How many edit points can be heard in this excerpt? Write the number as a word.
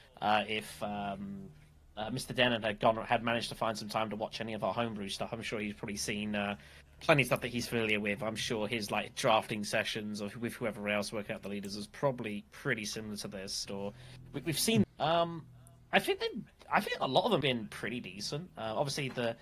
three